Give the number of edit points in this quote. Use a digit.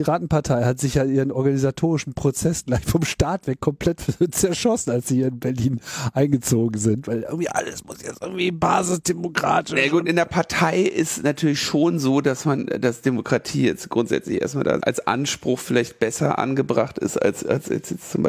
1